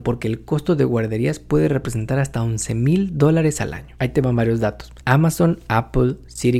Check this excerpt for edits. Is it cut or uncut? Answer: cut